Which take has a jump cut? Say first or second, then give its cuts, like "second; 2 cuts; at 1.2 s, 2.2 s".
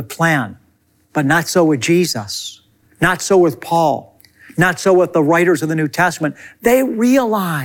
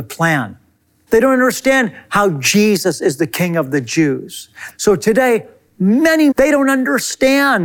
second; 3 cuts; at 1.1 s, 4.7 s, 6.3 s